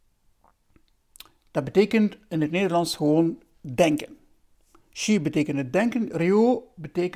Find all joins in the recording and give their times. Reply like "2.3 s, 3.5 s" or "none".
none